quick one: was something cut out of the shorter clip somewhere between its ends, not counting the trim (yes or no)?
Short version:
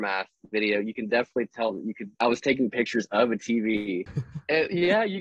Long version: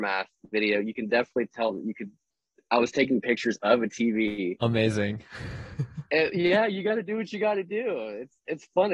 yes